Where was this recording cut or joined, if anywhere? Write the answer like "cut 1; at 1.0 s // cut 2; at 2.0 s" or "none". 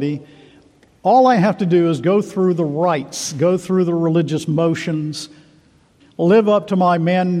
cut 1; at 6.0 s